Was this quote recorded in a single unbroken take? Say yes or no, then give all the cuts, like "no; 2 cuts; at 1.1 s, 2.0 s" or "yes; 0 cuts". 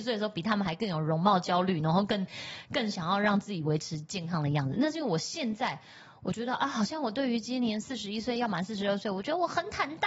yes; 0 cuts